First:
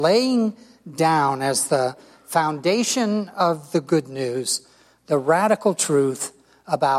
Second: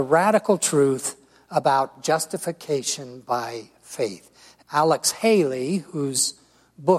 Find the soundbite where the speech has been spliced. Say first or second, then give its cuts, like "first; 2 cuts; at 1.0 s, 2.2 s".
second; 1 cut; at 4.6 s